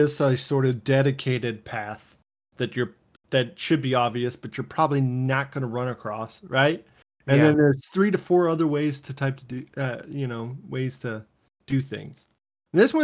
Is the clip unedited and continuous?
yes; 0 cuts

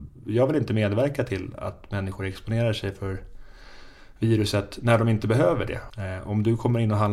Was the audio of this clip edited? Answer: yes; 1 cut; at 5.9 s

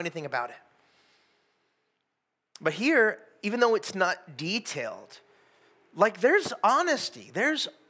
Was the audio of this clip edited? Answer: no; 0 cuts

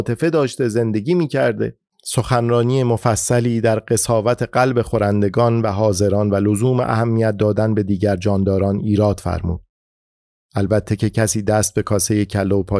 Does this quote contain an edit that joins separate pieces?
no; 0 cuts

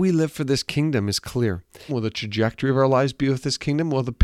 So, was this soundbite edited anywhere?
yes; 1 cut; at 1.9 s

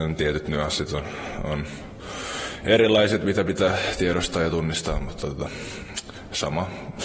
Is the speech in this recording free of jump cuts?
yes; 0 cuts

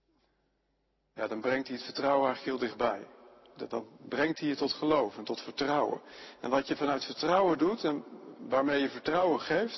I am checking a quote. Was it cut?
no; 0 cuts

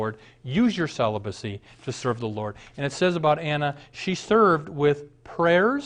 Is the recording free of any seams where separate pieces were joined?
yes; 0 cuts

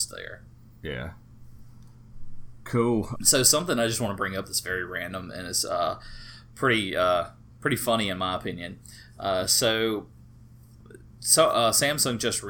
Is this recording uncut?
no; 1 cut; at 3.2 s

